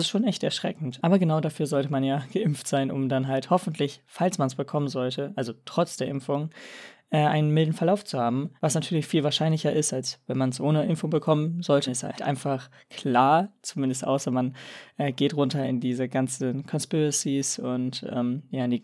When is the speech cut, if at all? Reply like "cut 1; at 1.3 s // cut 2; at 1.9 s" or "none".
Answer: cut 1; at 8.6 s // cut 2; at 11.9 s